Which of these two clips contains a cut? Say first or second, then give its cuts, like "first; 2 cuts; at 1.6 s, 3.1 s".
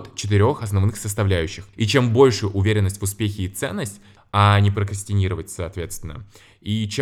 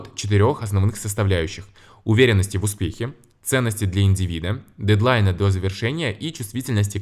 first; 2 cuts; at 1.7 s, 4.2 s